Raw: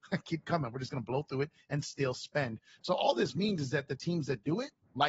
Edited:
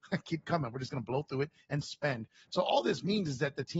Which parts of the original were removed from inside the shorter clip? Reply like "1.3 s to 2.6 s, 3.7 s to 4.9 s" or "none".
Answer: 1.8 s to 2.1 s